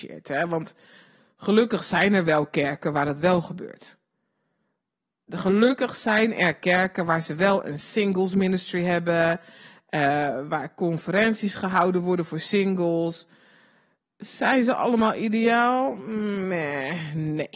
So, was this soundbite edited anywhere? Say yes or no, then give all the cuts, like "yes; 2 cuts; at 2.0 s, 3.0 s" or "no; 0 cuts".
no; 0 cuts